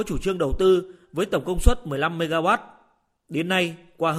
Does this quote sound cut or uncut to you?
uncut